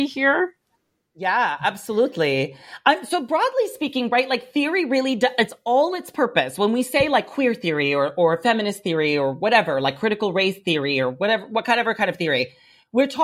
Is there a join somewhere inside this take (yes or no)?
no